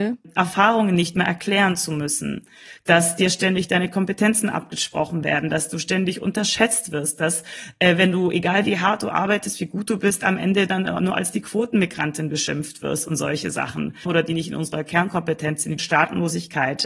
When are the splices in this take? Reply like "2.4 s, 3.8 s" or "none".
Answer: 14.1 s, 15.8 s